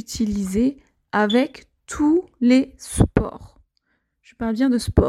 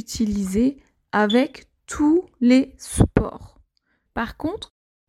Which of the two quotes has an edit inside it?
second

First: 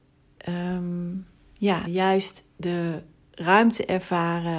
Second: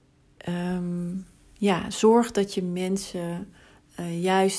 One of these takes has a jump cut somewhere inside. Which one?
first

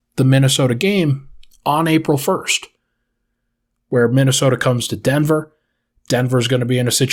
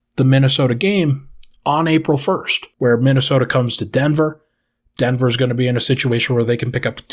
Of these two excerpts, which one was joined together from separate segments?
second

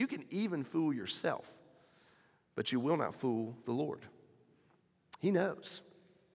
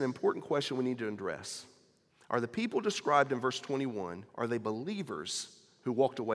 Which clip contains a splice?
second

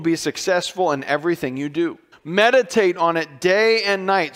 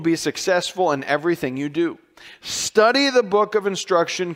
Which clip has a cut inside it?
first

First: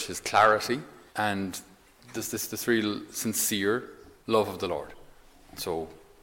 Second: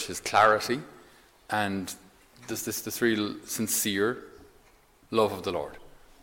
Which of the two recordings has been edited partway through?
first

